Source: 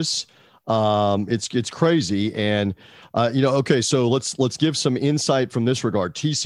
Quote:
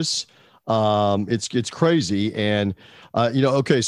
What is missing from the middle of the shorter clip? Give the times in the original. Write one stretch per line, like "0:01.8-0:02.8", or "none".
none